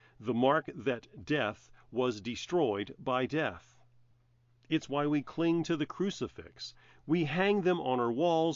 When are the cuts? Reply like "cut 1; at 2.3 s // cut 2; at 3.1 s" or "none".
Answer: none

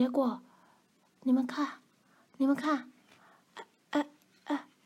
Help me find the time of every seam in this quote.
none

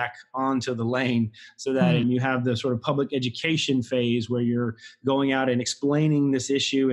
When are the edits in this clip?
cut 1; at 2.0 s

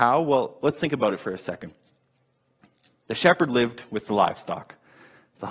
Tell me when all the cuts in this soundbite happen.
none

